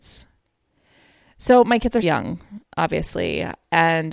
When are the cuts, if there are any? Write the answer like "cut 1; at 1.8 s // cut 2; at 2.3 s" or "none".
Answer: cut 1; at 2.0 s